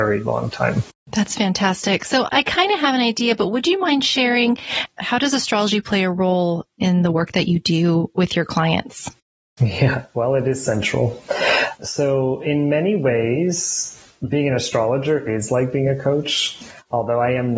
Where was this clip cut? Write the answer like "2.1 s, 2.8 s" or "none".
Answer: none